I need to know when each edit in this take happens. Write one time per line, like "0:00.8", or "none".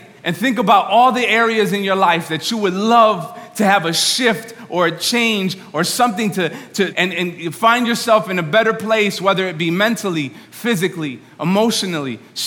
0:06.9